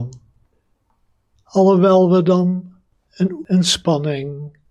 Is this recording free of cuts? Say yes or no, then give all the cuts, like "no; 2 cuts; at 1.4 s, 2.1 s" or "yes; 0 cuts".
no; 1 cut; at 1.3 s